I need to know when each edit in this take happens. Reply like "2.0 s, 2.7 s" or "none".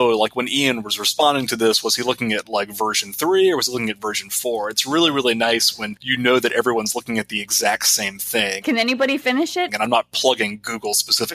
8.6 s, 9.7 s

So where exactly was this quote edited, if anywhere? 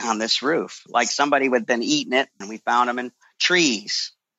2.4 s

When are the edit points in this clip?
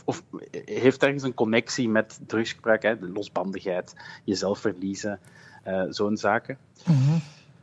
none

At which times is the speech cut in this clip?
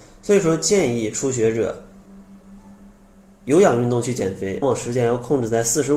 4.6 s

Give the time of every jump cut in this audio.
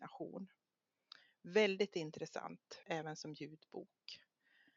2.8 s

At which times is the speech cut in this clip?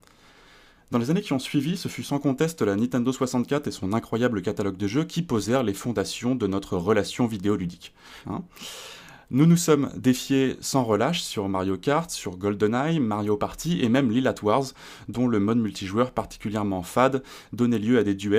8.2 s

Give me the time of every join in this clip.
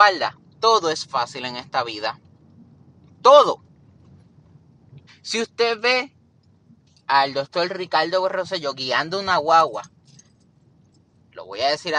5.1 s

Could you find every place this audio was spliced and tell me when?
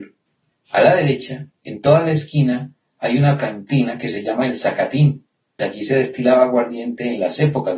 5.6 s

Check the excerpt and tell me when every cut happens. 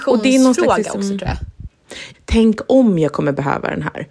2.1 s

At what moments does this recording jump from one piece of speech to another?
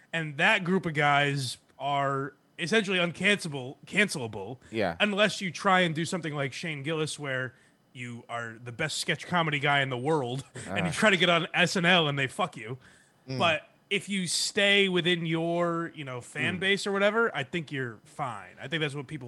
none

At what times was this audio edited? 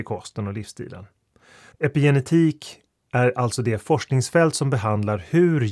1.7 s

